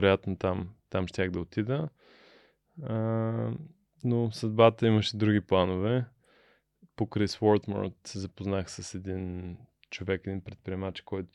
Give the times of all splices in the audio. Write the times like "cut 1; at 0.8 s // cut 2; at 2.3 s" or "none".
none